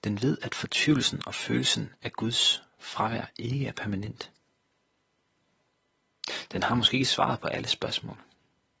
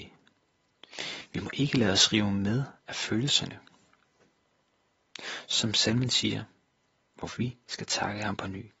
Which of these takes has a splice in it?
second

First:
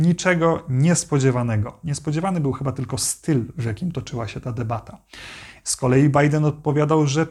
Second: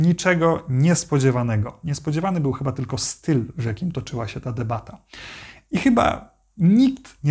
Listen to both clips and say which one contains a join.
first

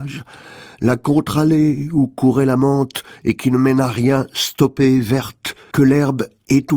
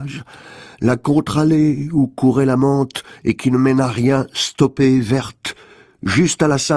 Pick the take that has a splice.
first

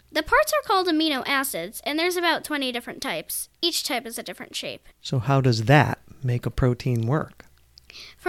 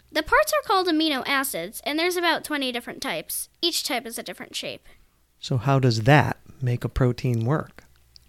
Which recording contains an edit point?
first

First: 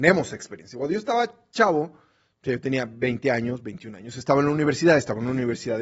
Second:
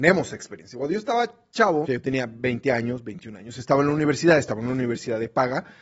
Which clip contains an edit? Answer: second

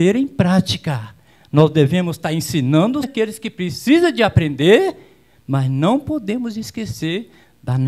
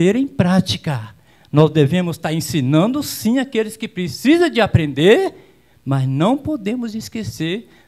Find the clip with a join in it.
first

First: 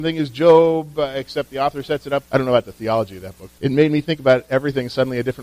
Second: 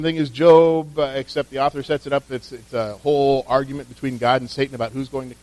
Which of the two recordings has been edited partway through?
first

